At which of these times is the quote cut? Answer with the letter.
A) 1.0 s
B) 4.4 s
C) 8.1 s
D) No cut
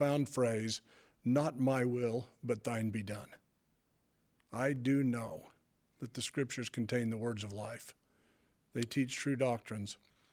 D